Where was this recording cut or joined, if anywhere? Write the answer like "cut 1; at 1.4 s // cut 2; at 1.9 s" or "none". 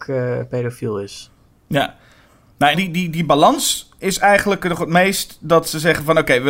cut 1; at 2.7 s